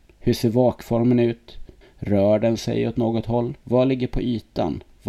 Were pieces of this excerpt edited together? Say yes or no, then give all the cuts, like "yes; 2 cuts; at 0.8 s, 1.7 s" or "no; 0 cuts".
yes; 2 cuts; at 1.8 s, 3.6 s